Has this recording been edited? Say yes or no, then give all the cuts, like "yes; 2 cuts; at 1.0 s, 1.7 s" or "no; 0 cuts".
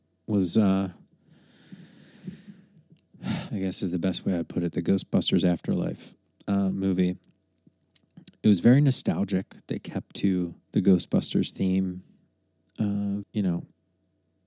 yes; 3 cuts; at 3.5 s, 10.6 s, 13.2 s